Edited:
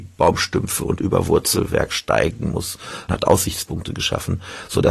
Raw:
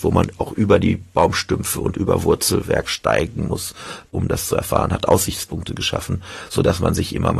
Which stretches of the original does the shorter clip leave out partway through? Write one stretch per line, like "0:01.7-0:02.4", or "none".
0:04.0-0:04.9